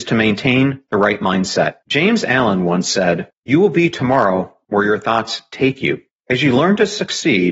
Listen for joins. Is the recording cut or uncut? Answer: cut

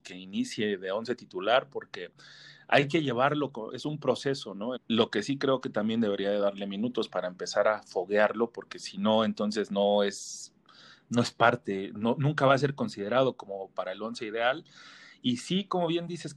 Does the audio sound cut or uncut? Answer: cut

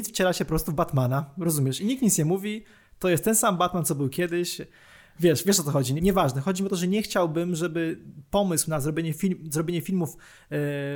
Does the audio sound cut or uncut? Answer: cut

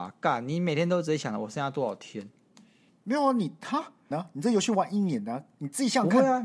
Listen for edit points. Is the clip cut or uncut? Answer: cut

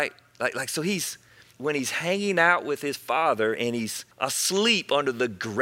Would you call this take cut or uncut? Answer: cut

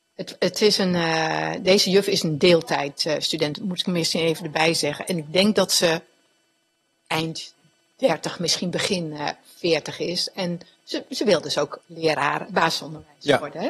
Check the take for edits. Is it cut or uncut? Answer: uncut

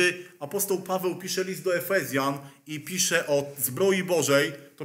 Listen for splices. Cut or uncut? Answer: uncut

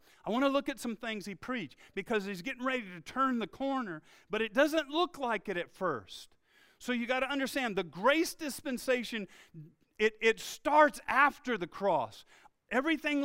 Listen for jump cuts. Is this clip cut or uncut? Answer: uncut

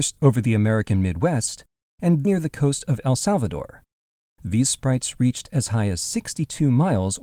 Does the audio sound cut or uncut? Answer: cut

